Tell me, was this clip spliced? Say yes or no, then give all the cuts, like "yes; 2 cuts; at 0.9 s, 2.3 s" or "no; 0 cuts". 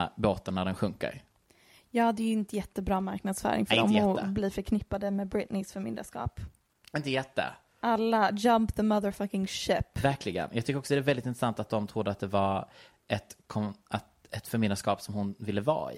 no; 0 cuts